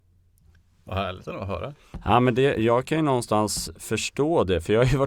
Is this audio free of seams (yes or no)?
yes